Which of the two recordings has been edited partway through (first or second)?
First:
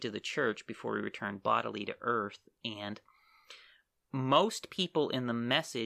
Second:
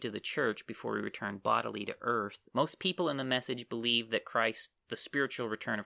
second